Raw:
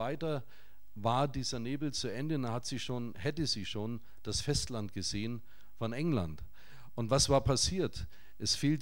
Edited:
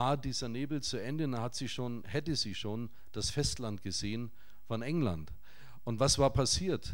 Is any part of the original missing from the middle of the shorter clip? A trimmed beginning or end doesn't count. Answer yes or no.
no